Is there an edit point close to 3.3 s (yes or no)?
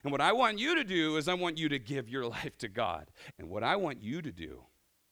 yes